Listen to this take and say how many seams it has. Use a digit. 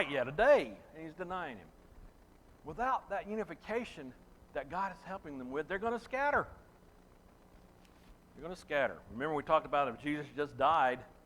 0